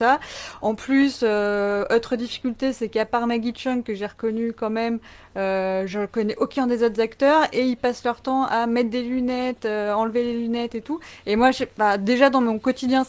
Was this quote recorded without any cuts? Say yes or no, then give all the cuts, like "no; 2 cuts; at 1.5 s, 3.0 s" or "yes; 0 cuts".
yes; 0 cuts